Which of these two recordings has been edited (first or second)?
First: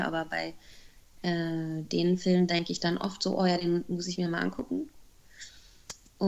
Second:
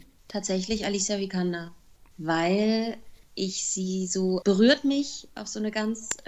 second